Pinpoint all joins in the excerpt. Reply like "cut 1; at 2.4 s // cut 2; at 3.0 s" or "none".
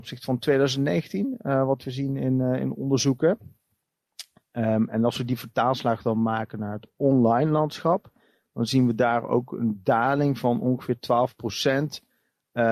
none